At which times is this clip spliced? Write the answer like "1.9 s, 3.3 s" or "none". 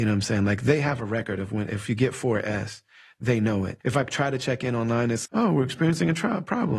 3.8 s, 5.3 s